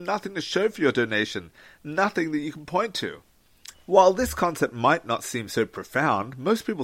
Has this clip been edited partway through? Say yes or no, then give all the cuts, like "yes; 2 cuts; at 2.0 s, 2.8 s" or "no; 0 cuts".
yes; 1 cut; at 3.7 s